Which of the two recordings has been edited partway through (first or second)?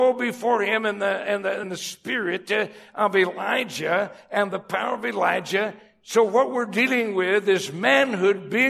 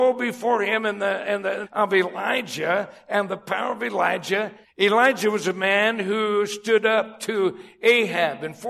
second